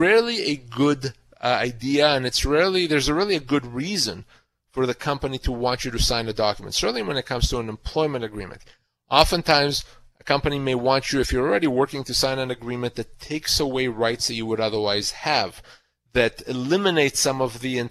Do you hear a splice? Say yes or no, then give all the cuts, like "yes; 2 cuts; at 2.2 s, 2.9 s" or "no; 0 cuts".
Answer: no; 0 cuts